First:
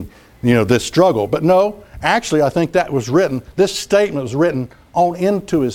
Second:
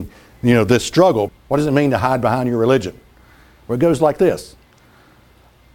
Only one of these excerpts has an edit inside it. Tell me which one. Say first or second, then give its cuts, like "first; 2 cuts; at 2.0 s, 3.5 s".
second; 1 cut; at 1.3 s